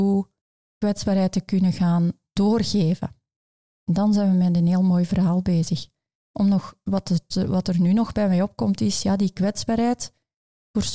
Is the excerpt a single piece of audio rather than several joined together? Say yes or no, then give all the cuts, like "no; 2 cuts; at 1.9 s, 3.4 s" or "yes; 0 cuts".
yes; 0 cuts